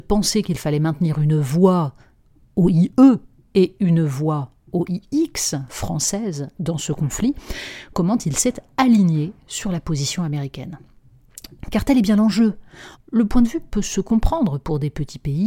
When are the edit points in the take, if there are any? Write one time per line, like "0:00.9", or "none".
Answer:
0:12.9